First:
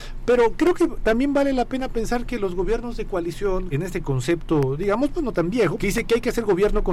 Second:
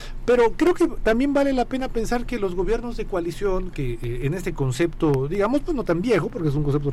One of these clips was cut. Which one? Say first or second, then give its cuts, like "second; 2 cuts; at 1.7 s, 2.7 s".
first; 2 cuts; at 3.7 s, 5.8 s